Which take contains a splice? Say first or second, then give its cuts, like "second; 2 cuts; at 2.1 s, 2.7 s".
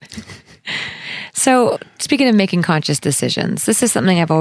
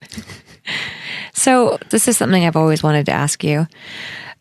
second; 1 cut; at 1.9 s